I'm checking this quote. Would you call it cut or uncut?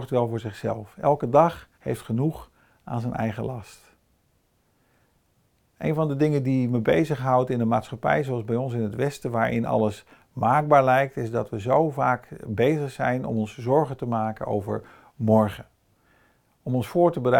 cut